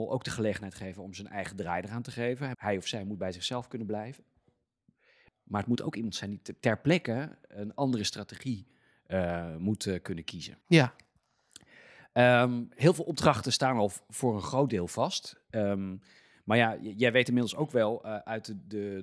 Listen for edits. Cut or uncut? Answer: cut